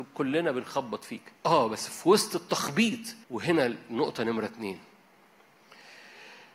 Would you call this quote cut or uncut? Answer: cut